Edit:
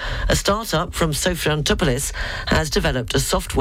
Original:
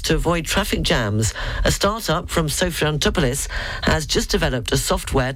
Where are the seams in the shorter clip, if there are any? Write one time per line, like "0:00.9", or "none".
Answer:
0:02.7